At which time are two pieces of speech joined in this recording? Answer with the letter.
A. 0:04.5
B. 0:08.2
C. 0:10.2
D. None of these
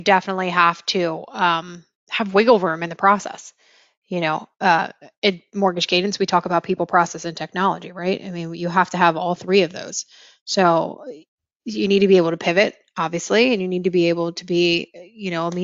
D